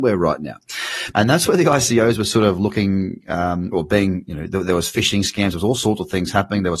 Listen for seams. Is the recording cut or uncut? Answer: cut